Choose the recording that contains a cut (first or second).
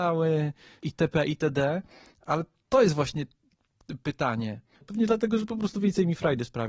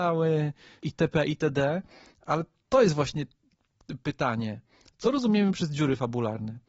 first